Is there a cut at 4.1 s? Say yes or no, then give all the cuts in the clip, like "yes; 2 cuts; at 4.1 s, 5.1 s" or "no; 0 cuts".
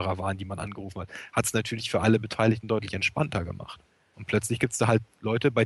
yes; 1 cut; at 4.1 s